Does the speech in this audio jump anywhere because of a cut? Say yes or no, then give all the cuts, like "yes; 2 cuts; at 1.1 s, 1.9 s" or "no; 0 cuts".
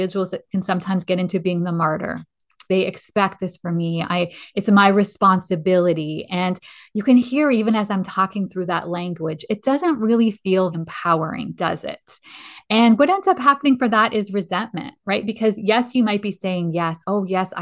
yes; 2 cuts; at 2.7 s, 10.7 s